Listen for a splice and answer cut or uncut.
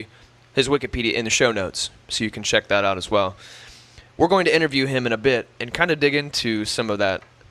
uncut